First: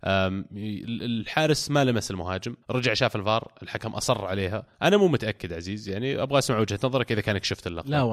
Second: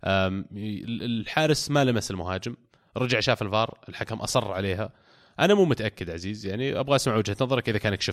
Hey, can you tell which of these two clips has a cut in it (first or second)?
first